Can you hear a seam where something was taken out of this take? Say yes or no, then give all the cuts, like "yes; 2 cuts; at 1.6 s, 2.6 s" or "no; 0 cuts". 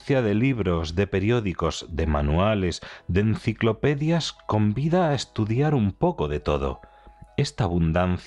no; 0 cuts